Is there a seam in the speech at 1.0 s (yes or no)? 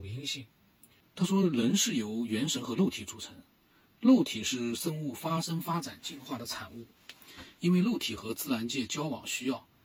yes